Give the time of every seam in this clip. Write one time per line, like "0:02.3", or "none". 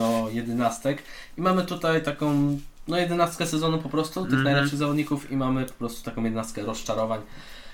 none